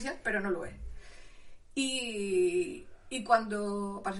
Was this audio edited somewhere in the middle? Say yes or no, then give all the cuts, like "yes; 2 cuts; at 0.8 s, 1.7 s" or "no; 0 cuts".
no; 0 cuts